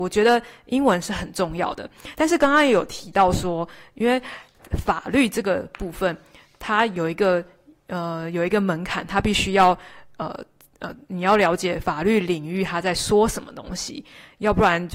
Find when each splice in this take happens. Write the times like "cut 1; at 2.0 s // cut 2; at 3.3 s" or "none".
none